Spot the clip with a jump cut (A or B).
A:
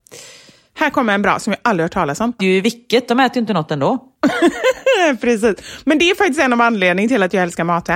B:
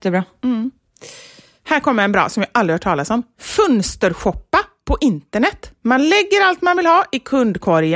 A